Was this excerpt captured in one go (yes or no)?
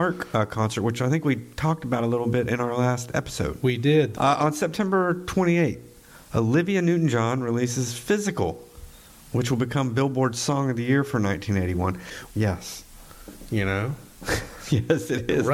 no